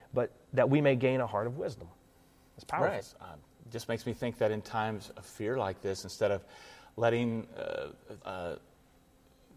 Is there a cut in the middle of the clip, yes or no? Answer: yes